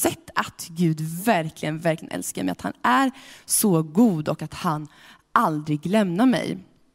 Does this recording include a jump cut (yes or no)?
no